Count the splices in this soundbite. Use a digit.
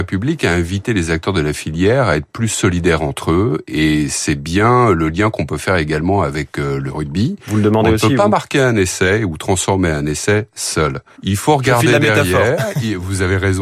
1